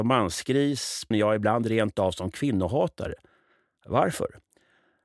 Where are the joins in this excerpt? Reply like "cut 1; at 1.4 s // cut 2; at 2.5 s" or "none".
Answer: cut 1; at 1.1 s